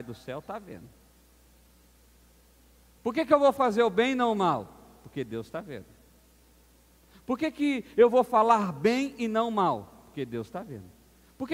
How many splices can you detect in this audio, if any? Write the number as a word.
zero